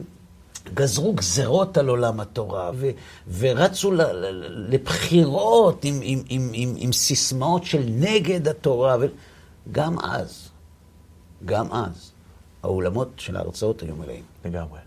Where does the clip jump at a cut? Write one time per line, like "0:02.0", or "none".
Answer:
0:02.7